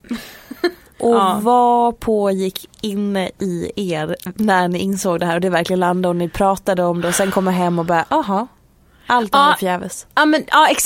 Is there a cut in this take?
no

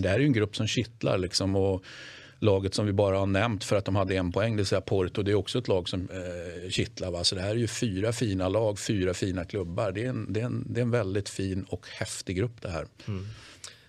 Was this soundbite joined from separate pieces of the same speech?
no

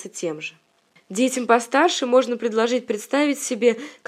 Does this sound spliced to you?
no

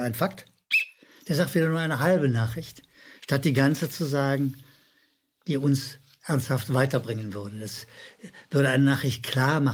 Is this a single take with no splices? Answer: yes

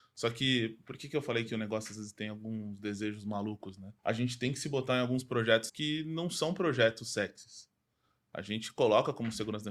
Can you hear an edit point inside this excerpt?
yes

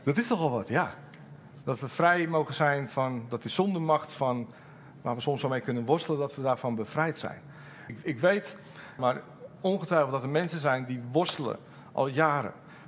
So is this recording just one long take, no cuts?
no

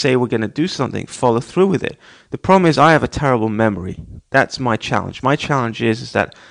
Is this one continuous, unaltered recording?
yes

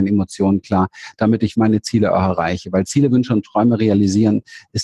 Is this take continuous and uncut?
no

